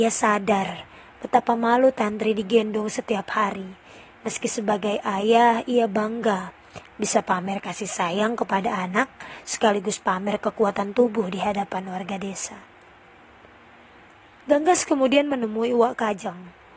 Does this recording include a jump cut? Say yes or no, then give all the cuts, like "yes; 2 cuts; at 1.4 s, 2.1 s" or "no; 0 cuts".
no; 0 cuts